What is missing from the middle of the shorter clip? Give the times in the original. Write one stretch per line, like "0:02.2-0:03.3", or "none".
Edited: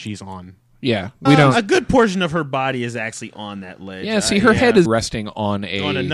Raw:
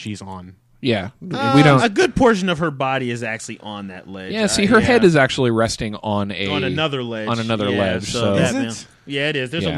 0:01.3-0:01.5
0:05.1-0:05.5